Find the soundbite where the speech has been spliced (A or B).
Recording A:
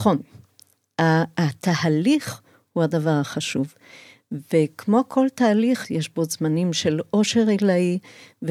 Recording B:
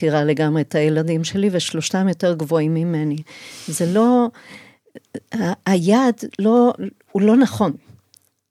A